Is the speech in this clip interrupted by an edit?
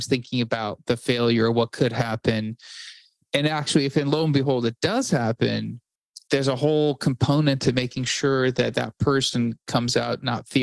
no; 0 cuts

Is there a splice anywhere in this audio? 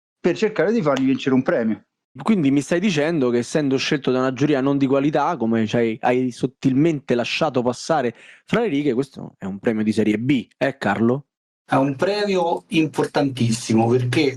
yes; 1 cut; at 2.2 s

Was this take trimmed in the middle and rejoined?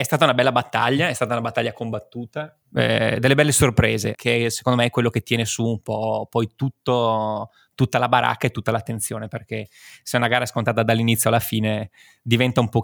yes; 2 cuts; at 2.6 s, 4.1 s

